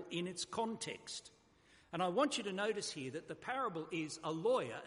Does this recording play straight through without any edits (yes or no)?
yes